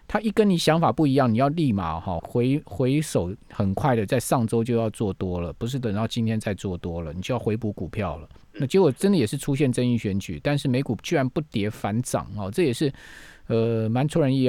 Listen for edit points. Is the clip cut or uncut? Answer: cut